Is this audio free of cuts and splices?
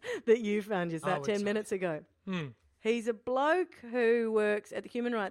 no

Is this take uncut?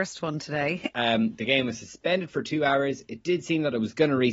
no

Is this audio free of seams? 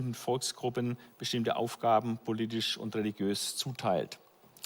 yes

